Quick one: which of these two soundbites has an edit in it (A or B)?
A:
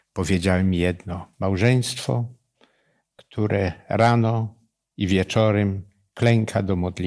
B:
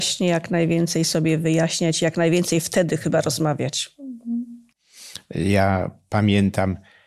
A